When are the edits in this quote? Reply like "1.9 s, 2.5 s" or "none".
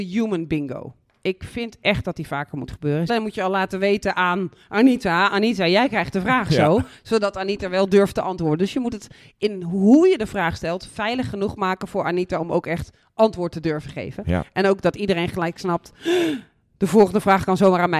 3.1 s